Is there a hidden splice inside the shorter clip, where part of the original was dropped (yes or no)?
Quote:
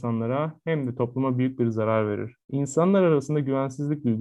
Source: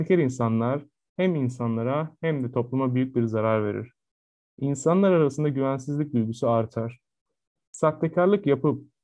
yes